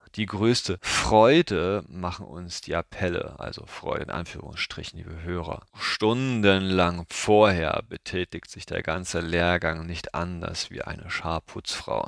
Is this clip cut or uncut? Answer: cut